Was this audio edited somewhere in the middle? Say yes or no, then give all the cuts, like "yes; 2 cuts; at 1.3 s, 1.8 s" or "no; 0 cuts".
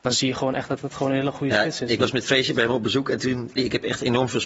yes; 1 cut; at 3.6 s